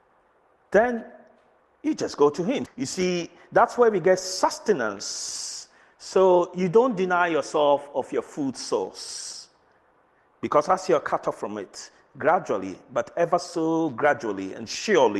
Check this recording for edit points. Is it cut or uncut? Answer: cut